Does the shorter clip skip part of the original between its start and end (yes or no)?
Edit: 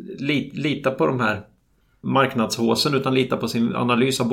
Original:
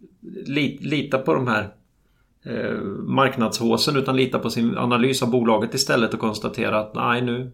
yes